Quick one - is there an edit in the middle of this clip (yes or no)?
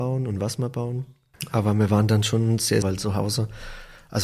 yes